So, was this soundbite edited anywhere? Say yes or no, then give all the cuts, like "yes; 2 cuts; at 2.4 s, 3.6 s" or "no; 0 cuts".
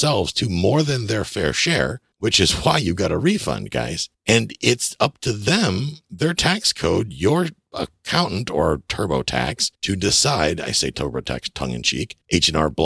no; 0 cuts